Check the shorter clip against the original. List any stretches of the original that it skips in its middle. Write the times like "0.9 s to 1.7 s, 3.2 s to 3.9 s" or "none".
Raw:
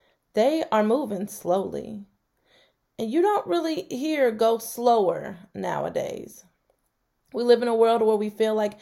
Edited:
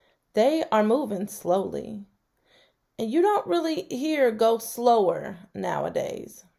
none